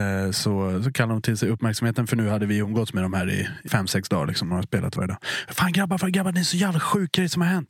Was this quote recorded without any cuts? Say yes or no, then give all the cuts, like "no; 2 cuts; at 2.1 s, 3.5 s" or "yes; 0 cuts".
no; 1 cut; at 3.7 s